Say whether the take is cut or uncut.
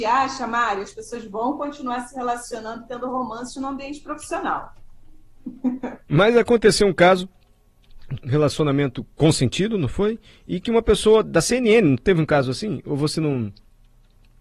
cut